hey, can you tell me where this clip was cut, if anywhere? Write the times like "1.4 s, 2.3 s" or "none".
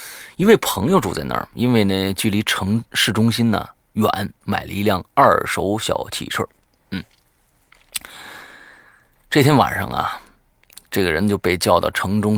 none